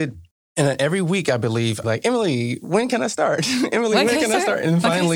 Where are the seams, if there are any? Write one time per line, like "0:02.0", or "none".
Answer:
0:01.8